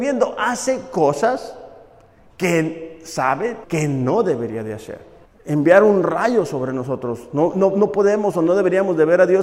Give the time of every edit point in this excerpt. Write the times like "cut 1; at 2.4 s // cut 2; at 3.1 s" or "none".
cut 1; at 3.6 s // cut 2; at 5.2 s